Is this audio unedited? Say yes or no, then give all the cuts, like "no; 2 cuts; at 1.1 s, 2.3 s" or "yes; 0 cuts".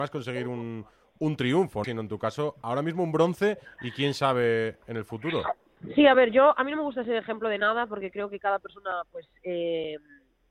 no; 1 cut; at 1.8 s